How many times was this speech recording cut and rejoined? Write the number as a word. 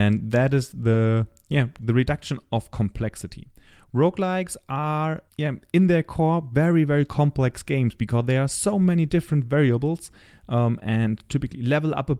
one